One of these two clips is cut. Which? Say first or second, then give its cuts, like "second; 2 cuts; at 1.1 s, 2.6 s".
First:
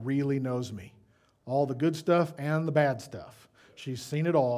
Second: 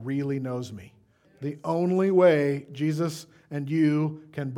second; 1 cut; at 1.2 s